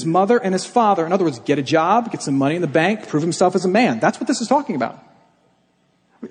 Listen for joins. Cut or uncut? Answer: uncut